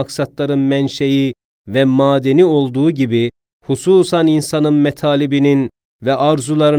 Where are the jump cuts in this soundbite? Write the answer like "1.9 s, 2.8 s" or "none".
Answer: 3.5 s